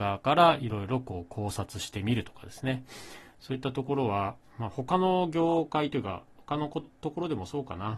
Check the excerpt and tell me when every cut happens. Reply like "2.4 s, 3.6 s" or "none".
6.8 s